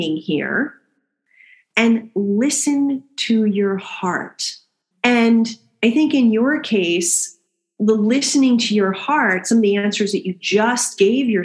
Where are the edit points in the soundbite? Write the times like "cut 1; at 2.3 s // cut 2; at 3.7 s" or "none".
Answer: cut 1; at 4.9 s